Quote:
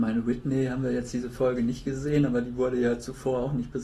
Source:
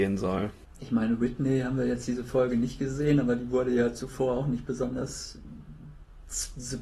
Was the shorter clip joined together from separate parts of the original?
no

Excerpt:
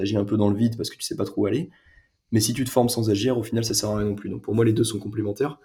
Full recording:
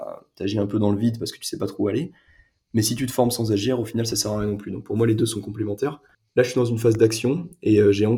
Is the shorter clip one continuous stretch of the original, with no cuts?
yes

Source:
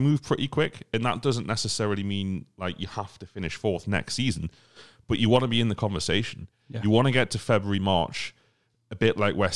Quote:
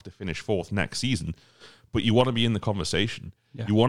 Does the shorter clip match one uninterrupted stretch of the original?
yes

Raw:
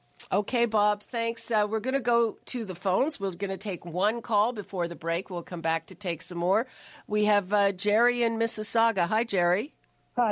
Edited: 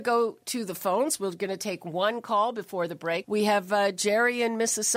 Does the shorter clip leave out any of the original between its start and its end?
yes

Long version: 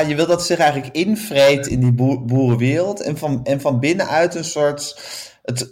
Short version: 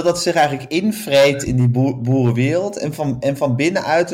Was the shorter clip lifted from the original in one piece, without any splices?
yes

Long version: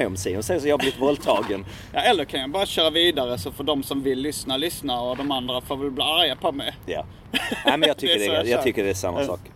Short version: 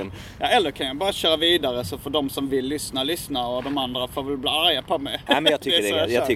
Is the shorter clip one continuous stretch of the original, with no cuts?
no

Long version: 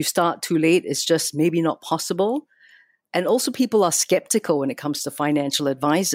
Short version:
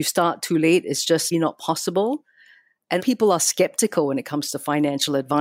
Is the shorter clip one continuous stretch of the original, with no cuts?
no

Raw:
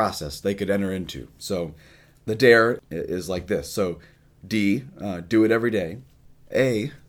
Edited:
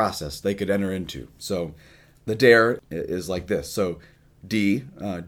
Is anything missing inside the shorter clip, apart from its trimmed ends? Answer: no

